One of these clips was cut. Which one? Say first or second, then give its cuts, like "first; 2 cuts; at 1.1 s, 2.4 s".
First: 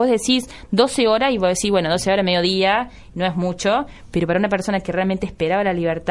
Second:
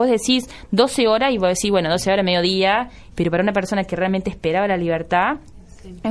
second; 1 cut; at 3.1 s